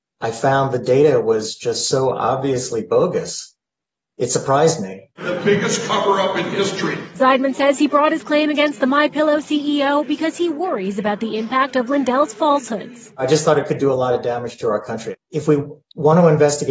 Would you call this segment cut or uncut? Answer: uncut